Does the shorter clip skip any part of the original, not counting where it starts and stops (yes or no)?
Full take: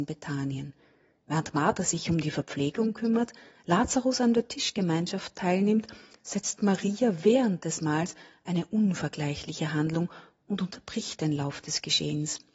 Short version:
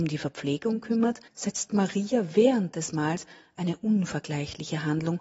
yes